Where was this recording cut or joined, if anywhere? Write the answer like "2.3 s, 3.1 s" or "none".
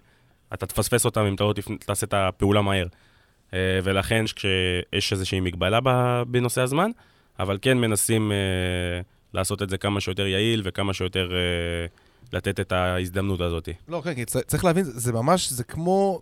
4.3 s